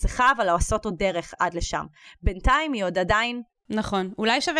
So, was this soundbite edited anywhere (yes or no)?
yes